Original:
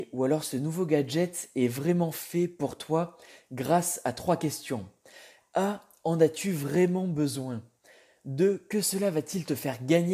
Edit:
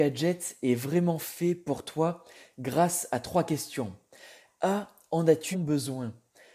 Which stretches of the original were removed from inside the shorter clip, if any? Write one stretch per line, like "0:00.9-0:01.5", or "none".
0:06.4-0:07.0

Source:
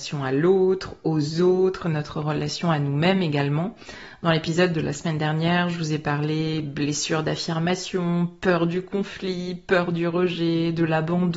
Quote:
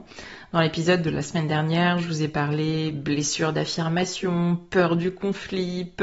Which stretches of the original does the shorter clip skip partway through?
none

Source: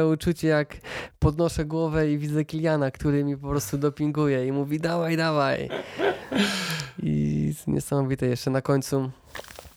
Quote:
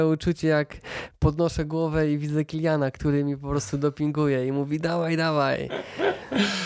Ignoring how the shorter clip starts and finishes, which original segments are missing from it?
none

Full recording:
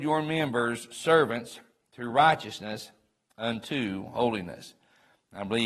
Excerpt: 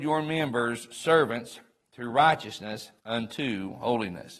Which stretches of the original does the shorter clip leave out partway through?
0:03.0-0:03.3

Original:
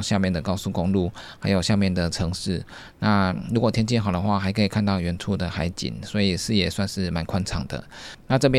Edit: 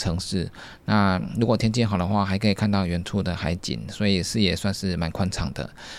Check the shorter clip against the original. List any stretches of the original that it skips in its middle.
none

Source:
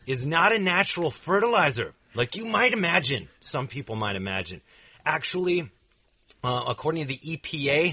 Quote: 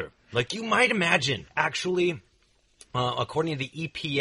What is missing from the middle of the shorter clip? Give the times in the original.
0:03.3-0:05.0

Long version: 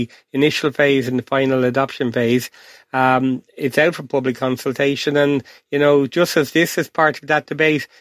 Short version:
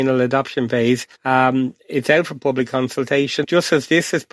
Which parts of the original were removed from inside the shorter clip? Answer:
0:02.6-0:02.8
0:05.1-0:06.1

